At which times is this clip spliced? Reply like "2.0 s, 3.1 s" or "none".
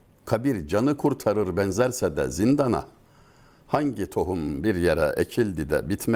none